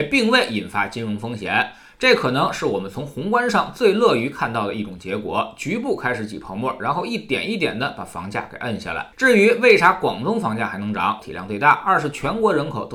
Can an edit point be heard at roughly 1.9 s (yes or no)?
no